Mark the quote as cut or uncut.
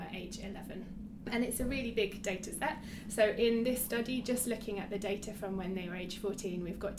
uncut